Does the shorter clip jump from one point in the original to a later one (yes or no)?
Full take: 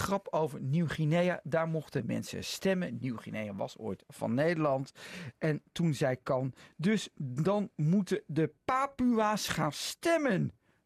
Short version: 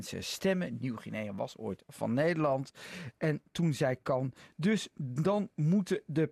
no